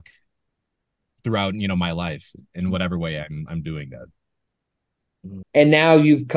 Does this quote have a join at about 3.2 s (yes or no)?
no